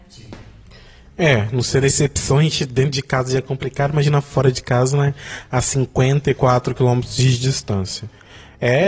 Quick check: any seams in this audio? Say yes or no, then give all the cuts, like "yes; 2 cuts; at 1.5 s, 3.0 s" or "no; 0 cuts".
no; 0 cuts